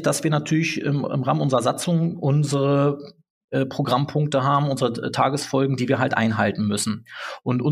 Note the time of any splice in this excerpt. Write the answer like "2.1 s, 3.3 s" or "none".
none